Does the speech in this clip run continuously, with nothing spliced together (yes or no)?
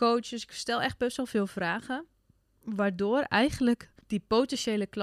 no